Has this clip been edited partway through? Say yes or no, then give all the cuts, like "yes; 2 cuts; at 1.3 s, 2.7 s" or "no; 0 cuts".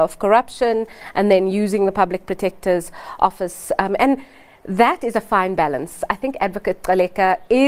no; 0 cuts